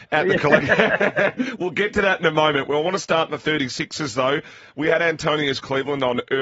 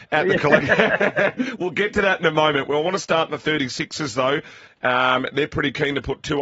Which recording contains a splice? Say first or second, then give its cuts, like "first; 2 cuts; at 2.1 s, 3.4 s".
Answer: second; 1 cut; at 4.7 s